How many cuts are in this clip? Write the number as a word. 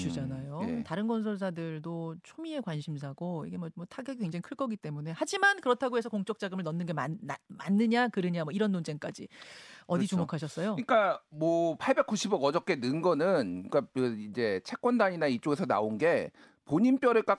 zero